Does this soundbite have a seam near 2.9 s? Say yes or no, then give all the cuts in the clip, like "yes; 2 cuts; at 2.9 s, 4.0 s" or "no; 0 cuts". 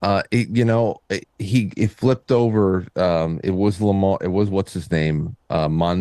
no; 1 cut; at 1.2 s